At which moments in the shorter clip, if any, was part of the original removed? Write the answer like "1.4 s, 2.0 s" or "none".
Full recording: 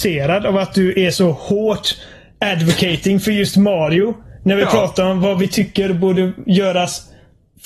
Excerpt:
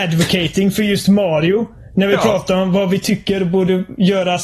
none